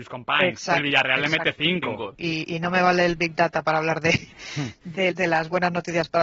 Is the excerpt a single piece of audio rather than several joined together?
no; 2 cuts; at 2.1 s, 5.1 s

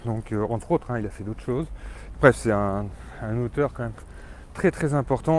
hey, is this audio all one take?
no; 1 cut; at 2.1 s

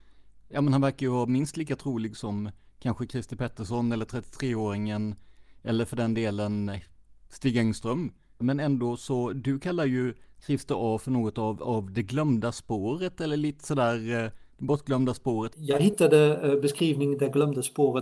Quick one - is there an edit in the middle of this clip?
yes; 2 cuts; at 8.4 s, 15.5 s

